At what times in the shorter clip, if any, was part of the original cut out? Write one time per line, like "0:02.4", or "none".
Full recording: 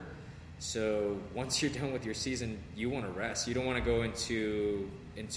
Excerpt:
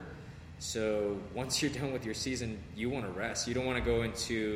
none